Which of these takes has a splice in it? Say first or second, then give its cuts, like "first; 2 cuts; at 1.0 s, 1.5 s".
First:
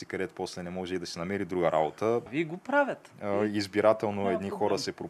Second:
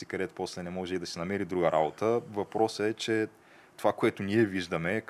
first; 1 cut; at 2.3 s